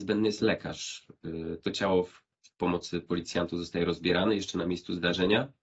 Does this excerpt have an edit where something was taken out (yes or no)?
no